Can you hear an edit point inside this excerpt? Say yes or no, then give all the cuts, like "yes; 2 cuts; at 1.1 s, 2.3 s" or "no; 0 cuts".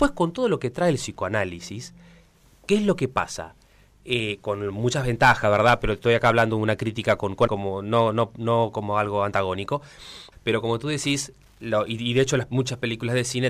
yes; 2 cuts; at 7.5 s, 10.3 s